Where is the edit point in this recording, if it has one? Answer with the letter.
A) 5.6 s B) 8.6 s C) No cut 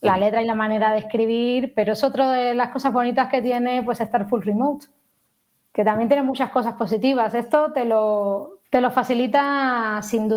B